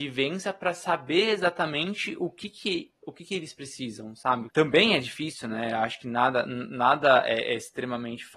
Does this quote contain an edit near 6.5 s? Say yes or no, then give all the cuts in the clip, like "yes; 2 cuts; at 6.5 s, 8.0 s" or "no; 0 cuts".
no; 1 cut; at 4.5 s